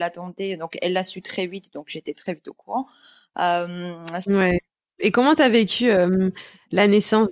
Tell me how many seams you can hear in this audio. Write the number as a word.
one